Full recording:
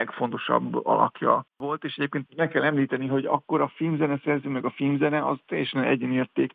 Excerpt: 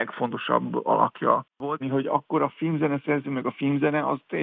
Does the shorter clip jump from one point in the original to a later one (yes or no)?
yes